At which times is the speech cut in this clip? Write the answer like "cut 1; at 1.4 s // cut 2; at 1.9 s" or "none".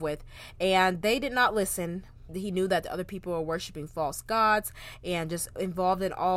cut 1; at 2.3 s